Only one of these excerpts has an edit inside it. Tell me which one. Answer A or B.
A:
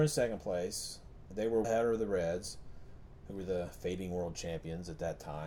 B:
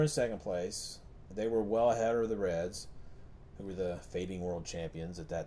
A